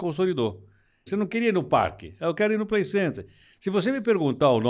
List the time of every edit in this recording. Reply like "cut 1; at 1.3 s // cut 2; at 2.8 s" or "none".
cut 1; at 1.1 s